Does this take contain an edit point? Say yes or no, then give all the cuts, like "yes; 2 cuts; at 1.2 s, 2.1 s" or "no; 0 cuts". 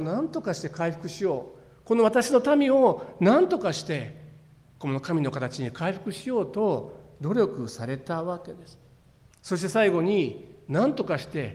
yes; 1 cut; at 9.3 s